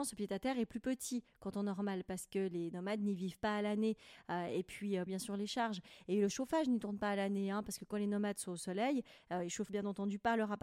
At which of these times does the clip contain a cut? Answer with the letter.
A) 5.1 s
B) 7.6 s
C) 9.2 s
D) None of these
A